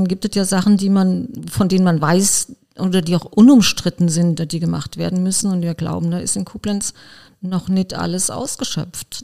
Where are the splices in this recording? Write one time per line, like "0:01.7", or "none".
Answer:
none